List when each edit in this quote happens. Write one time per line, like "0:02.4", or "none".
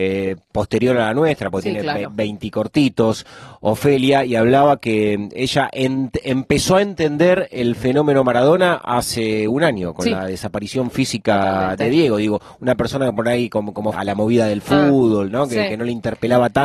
0:13.9